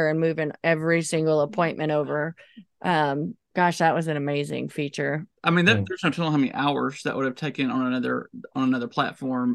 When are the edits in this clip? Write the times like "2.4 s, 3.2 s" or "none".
3.5 s

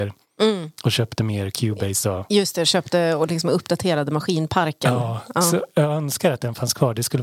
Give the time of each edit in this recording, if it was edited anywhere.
none

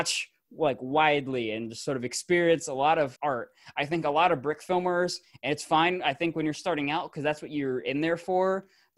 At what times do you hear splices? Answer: 3.2 s

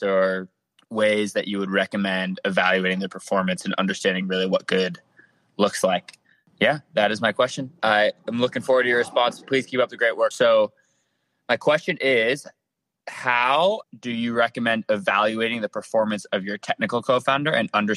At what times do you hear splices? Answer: 10.3 s, 13.8 s

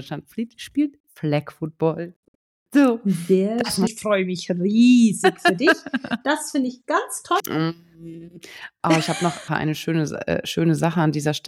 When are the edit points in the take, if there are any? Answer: 3.9 s, 7.4 s, 9.5 s

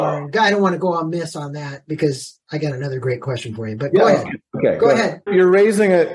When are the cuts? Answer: 5.3 s

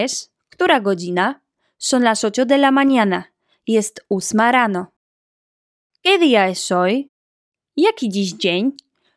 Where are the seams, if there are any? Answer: none

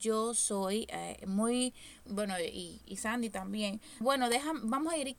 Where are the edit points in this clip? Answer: 2.1 s, 4.0 s

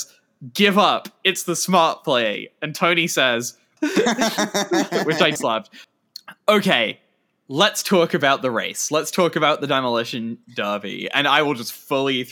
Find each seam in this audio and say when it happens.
3.8 s, 5.4 s

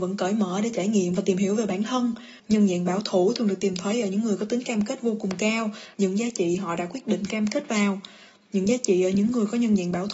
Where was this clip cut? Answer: 2.4 s, 5.9 s

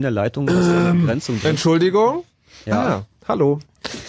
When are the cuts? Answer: none

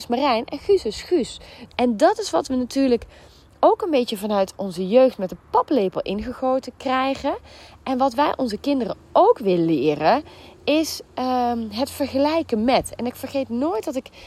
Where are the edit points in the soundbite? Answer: 1.7 s

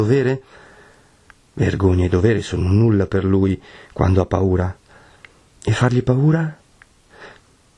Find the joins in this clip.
none

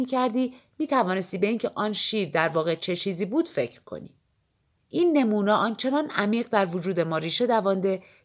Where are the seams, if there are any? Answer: 4.8 s

